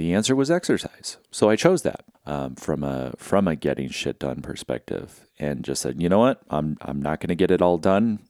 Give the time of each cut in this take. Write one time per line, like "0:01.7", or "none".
0:02.1